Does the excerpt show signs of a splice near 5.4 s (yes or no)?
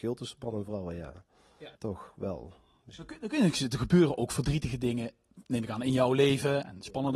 yes